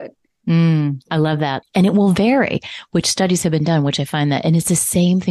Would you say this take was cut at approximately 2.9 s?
no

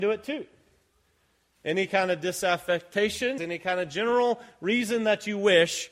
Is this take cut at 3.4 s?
yes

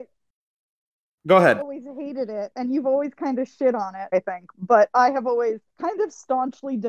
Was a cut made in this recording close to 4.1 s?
yes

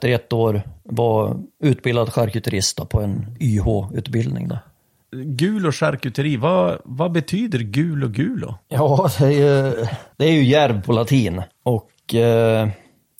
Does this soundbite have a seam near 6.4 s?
no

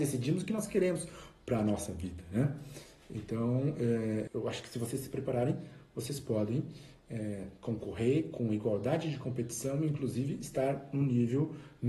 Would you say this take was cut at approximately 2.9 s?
no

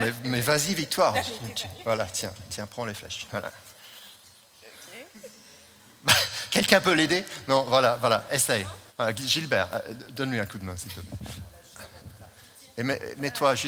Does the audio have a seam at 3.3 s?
yes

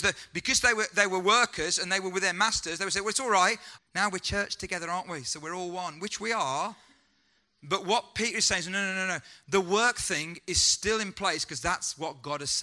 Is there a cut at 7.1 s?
no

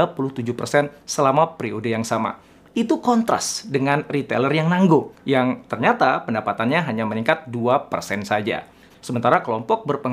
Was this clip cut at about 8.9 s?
yes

